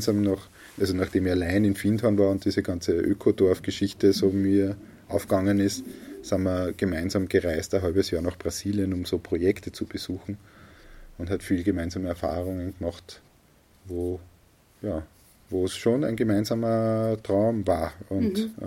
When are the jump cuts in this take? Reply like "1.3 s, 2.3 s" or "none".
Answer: none